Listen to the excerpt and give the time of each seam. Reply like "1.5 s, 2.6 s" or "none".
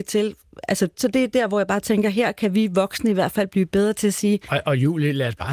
0.9 s